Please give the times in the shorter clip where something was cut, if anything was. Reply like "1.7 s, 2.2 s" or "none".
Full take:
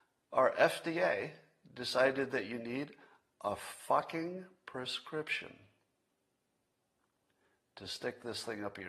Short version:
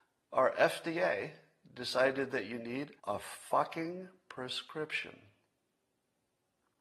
3.0 s